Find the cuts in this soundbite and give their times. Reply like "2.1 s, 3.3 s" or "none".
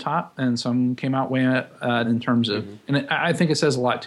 2.0 s